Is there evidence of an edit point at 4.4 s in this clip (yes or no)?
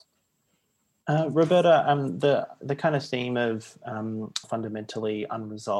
yes